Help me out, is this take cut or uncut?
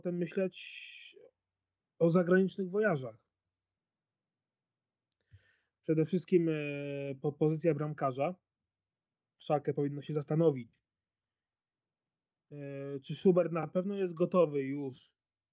uncut